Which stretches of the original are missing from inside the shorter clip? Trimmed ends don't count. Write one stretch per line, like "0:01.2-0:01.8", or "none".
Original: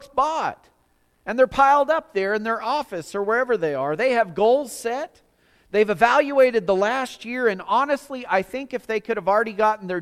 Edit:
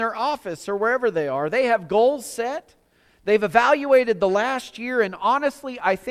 none